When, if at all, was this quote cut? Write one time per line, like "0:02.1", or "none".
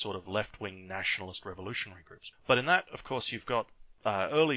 0:02.3